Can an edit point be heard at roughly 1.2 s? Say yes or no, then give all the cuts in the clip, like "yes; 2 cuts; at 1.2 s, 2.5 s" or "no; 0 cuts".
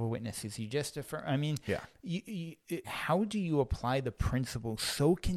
no; 1 cut; at 2.8 s